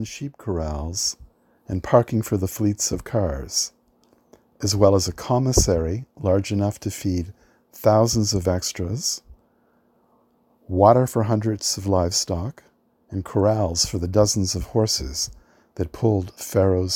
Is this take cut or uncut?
uncut